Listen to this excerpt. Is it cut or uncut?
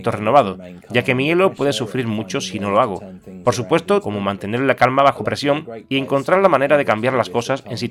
cut